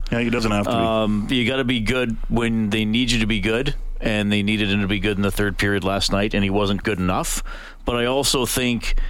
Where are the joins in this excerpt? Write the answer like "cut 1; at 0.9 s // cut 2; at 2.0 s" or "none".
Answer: cut 1; at 6.8 s